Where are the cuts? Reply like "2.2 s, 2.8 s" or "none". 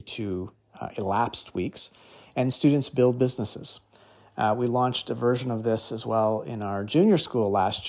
none